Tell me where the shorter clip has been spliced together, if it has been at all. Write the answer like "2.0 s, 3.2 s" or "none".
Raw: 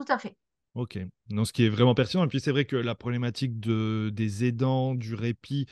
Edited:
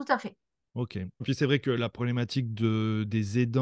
1.2 s